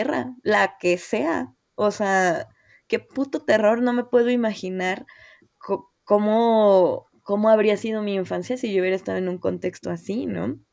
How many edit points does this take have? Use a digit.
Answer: 0